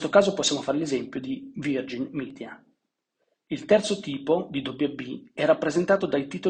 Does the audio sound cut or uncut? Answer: uncut